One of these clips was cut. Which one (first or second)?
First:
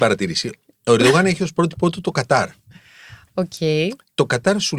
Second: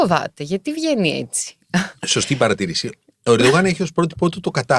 second